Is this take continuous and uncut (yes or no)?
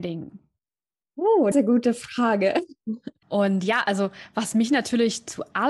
no